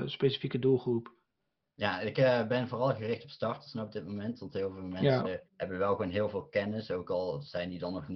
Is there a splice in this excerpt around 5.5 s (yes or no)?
yes